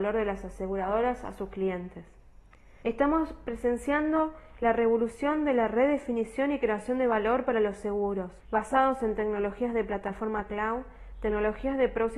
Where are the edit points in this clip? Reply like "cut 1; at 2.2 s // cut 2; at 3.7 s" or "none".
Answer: cut 1; at 2.8 s // cut 2; at 8.4 s